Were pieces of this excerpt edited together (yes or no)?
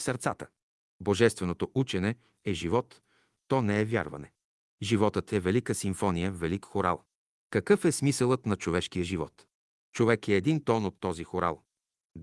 no